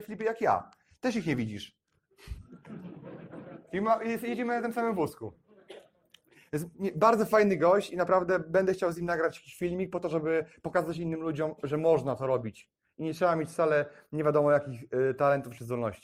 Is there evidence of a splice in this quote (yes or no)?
no